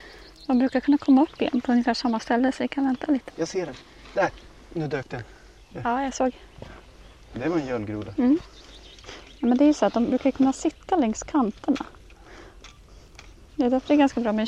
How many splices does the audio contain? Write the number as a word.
one